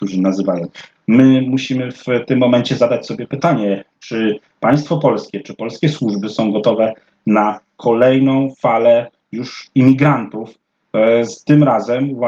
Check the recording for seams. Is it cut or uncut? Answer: cut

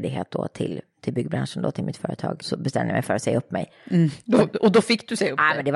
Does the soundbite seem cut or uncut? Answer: cut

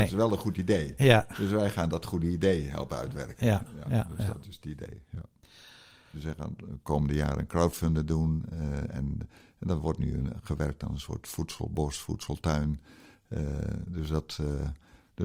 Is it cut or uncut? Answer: cut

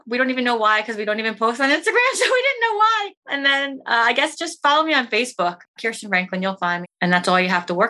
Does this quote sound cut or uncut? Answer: cut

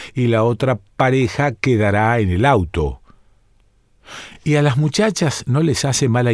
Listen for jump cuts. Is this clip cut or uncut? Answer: uncut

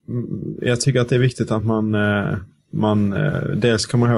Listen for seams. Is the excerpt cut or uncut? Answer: uncut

